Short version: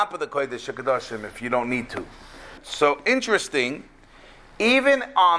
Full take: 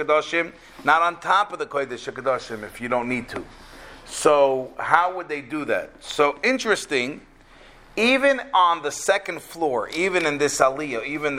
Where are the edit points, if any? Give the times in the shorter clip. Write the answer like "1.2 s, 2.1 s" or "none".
2.6 s